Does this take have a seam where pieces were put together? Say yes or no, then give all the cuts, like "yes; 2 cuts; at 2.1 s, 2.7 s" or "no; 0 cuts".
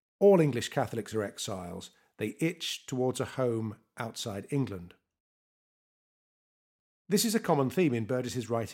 no; 0 cuts